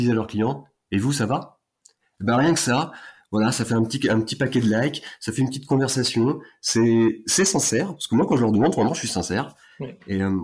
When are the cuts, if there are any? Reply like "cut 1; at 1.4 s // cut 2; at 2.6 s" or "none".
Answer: none

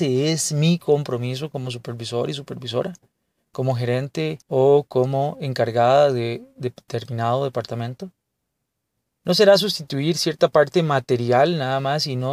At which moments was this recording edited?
cut 1; at 4.4 s

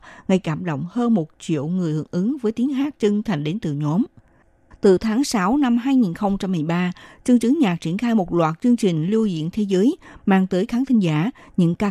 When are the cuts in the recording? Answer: cut 1; at 4.7 s

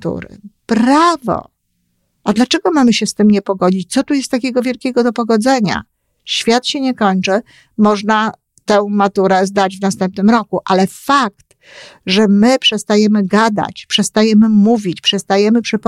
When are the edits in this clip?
none

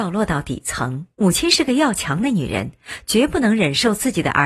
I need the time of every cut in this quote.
cut 1; at 1.1 s

